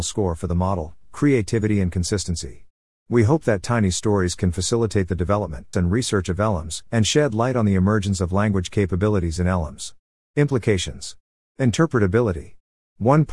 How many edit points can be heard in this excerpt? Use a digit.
3